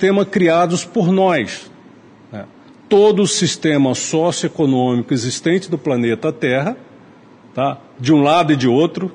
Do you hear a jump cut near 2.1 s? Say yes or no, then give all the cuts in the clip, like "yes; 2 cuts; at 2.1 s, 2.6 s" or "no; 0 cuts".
no; 0 cuts